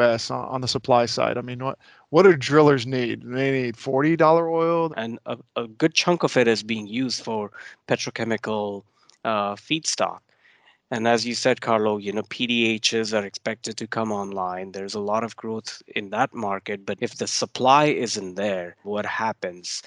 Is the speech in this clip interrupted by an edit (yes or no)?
yes